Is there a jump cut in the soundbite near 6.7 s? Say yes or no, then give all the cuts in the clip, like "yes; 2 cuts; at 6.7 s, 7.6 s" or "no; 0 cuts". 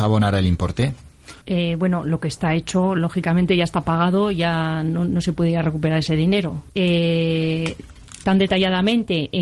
yes; 3 cuts; at 1.4 s, 6.7 s, 8.2 s